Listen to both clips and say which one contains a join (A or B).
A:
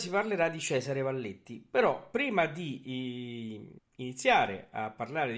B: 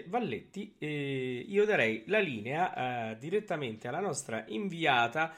A